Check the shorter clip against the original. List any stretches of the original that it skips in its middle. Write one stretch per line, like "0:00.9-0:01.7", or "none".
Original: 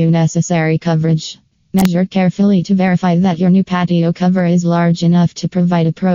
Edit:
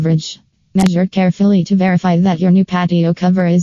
none